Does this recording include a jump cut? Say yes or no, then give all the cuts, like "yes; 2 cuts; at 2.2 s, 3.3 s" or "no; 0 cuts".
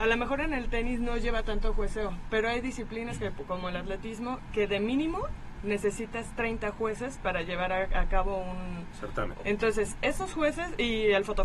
yes; 1 cut; at 9.4 s